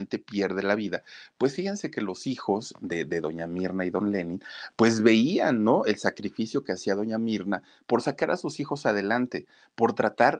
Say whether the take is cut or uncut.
uncut